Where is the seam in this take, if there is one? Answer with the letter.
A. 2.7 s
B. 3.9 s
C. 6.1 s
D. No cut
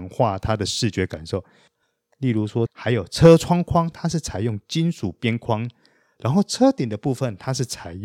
A